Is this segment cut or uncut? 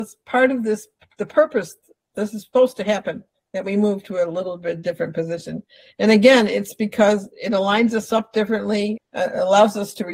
cut